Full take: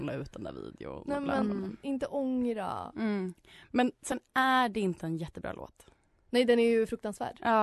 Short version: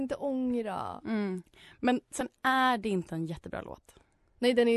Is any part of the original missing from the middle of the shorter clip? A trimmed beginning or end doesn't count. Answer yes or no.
no